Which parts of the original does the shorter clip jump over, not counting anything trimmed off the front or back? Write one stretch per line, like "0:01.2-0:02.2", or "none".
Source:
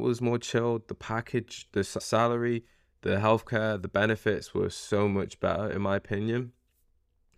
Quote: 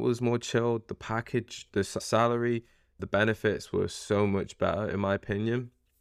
0:03.0-0:03.8